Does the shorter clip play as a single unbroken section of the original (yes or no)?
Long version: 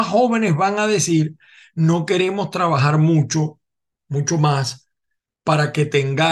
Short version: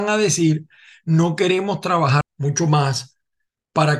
no